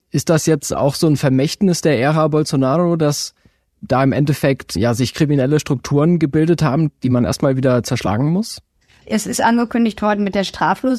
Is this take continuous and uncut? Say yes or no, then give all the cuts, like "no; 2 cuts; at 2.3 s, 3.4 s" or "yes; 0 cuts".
no; 1 cut; at 9.0 s